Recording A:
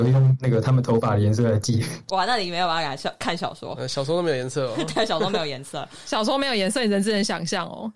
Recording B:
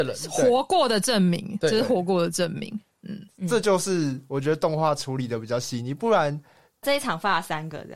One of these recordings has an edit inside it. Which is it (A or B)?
B